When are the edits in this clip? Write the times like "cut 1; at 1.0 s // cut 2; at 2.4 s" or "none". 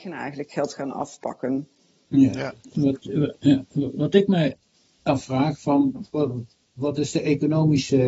cut 1; at 6.1 s